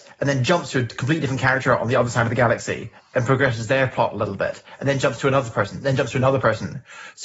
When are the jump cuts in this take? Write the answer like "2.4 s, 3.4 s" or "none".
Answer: 5.8 s